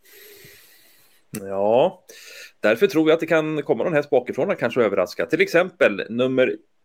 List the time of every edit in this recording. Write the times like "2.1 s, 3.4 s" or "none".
1.4 s